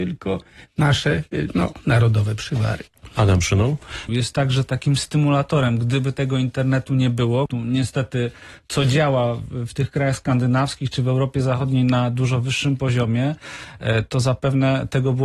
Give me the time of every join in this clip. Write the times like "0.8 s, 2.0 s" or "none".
4.1 s, 7.5 s